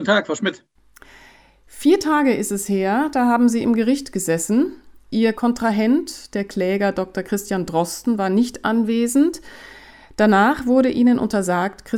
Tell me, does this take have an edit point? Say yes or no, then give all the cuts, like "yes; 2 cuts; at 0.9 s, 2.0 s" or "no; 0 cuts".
no; 0 cuts